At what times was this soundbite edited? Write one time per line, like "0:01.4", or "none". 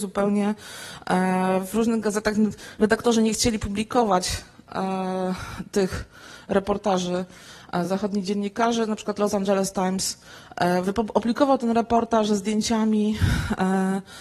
none